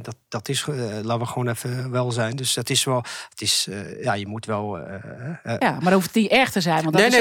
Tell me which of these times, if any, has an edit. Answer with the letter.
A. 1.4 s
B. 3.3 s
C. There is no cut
C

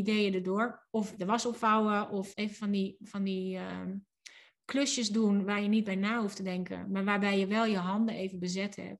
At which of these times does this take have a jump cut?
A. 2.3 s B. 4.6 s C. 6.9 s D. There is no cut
A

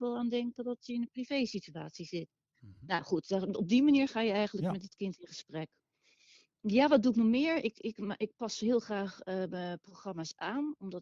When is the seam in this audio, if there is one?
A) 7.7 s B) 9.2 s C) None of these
C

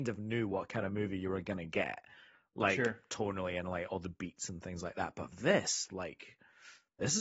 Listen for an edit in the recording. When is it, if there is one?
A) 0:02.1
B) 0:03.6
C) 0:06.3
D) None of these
D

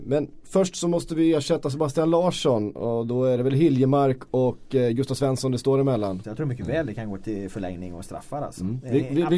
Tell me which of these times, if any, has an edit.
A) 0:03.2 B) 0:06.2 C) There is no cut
B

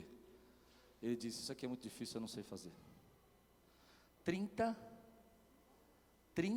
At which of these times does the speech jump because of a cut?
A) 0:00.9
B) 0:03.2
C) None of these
C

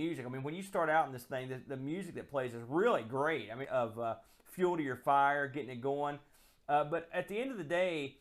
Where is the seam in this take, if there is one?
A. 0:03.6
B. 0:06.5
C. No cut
A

